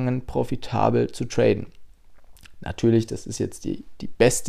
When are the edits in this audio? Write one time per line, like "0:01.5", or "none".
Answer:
none